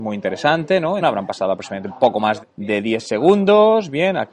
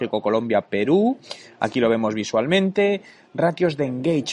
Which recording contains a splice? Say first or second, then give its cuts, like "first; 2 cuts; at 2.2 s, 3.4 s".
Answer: first; 2 cuts; at 1.0 s, 2.4 s